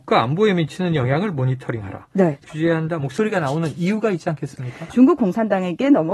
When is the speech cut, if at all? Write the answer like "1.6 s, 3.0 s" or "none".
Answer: 2.4 s, 4.9 s